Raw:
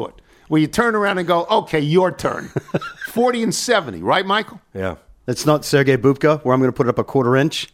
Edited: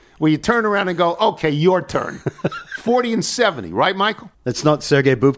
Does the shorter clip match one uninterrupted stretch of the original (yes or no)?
no